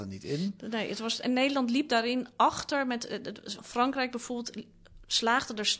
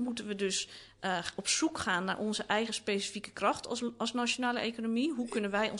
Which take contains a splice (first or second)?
first